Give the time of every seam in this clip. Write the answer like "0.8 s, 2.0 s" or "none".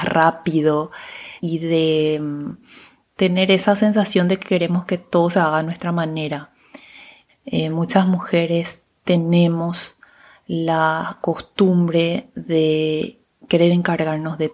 1.4 s, 7.3 s